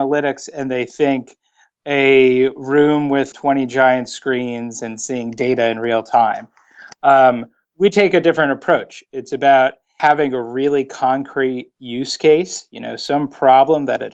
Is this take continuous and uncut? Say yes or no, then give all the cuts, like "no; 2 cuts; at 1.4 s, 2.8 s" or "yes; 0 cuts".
yes; 0 cuts